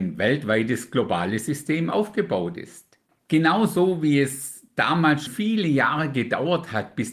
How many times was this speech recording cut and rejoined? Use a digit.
2